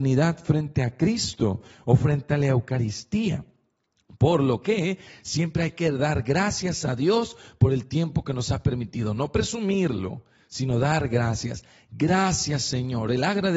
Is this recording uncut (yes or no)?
yes